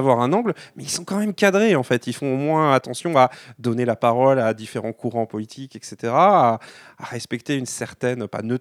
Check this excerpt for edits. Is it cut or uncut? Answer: uncut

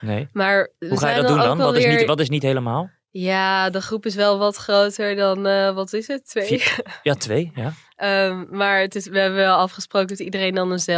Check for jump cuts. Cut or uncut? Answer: uncut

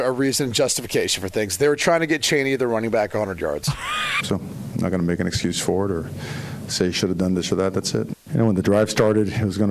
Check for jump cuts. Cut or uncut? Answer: cut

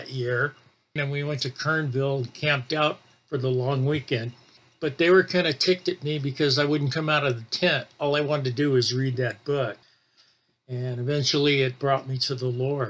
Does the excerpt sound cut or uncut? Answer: cut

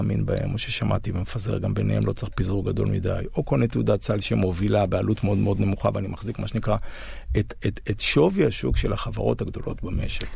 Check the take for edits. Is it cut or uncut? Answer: uncut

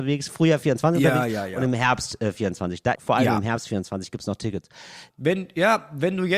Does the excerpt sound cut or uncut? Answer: cut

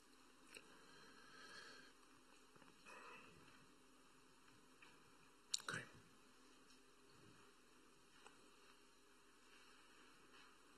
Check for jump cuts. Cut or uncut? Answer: uncut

